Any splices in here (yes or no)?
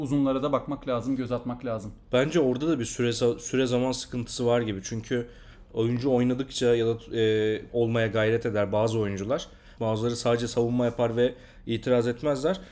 yes